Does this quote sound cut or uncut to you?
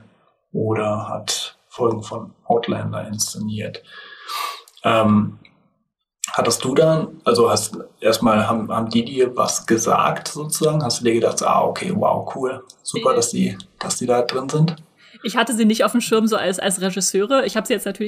uncut